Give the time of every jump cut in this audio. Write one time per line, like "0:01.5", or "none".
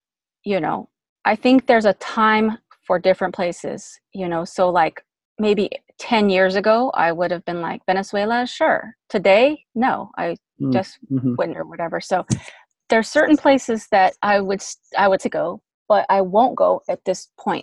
0:11.5
0:15.2